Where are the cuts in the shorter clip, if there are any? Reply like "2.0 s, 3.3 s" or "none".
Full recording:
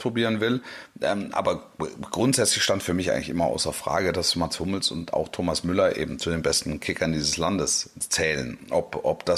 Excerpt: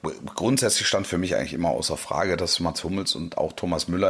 none

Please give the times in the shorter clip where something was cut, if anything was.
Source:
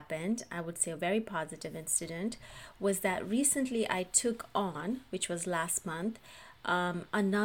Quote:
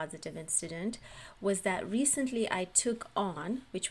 none

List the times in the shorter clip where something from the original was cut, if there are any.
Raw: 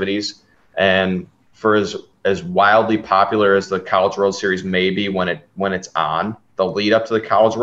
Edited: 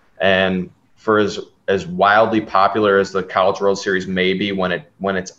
none

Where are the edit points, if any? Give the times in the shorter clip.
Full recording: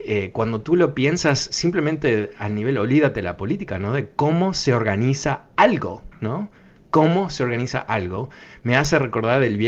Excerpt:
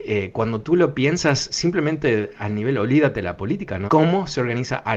3.9 s

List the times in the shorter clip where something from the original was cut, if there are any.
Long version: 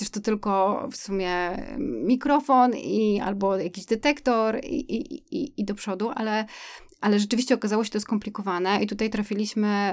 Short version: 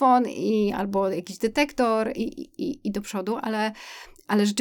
2.1 s

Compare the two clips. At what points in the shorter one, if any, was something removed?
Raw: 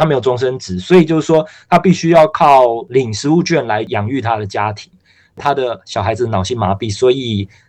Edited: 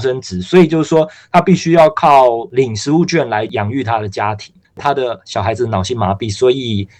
4.6 s

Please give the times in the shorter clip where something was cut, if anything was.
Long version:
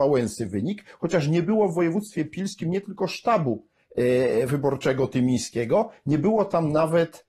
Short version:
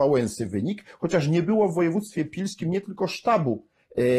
none

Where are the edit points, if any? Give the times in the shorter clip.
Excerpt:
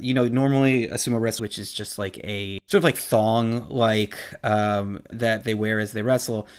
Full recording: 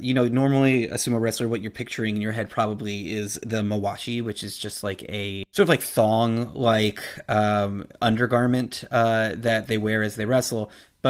1.4 s, 5.1 s

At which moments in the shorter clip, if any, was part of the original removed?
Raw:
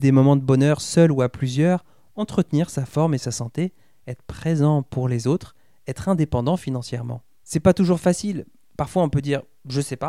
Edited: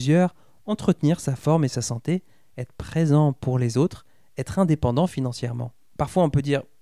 5.9 s

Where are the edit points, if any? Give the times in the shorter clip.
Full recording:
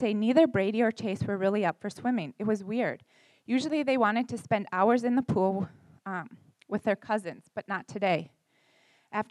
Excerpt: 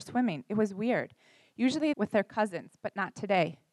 1.9 s

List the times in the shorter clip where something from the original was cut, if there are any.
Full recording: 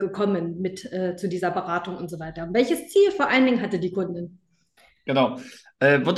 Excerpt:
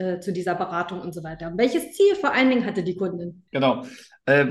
3.5 s

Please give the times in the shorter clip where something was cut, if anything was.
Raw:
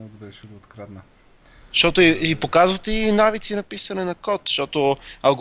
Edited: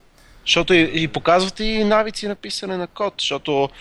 none

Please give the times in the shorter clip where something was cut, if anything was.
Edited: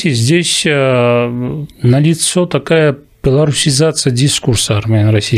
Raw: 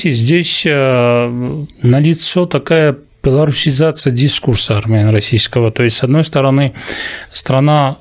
none

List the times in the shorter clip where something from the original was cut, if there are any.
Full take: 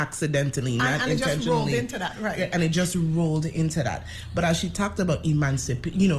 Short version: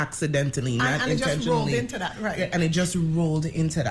none

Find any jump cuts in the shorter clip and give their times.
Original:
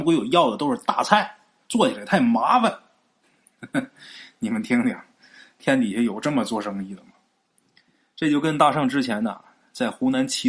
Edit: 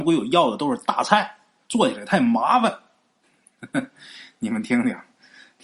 none

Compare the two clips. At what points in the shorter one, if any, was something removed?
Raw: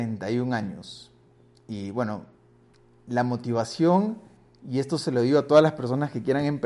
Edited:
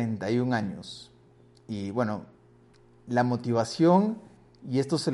none

